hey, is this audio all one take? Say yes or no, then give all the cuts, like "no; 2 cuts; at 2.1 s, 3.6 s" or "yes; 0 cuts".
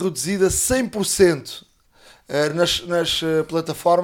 yes; 0 cuts